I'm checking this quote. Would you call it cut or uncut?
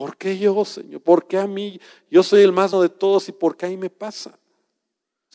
cut